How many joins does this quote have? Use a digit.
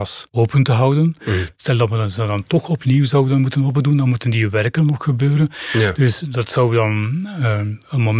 0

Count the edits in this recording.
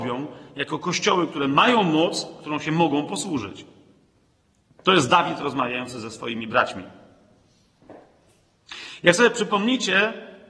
0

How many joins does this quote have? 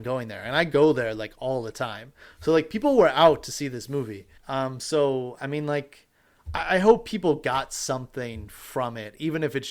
1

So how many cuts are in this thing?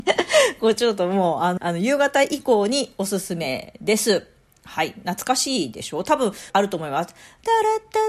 2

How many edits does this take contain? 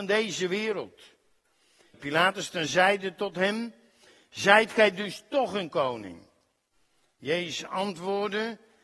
1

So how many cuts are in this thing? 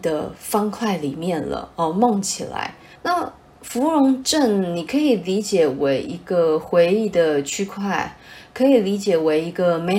1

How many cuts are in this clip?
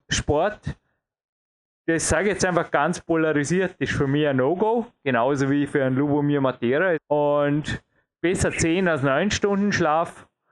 1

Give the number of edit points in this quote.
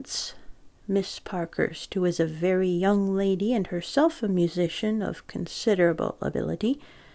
0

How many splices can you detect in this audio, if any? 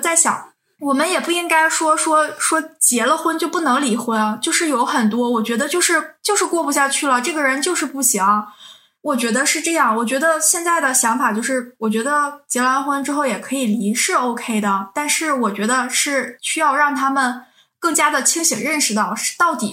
0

